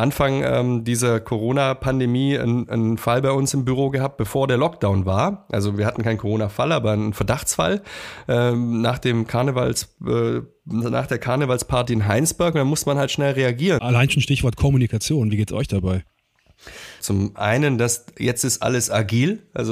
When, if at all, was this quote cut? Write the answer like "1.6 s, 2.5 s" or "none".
13.8 s, 17.0 s